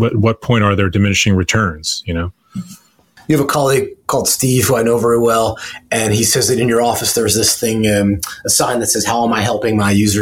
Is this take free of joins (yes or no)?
yes